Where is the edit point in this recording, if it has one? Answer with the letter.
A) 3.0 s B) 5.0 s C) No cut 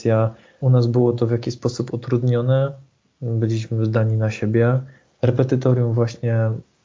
B